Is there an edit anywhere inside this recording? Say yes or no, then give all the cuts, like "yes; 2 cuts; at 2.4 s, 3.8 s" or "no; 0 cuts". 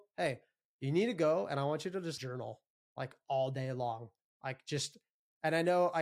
yes; 1 cut; at 2.2 s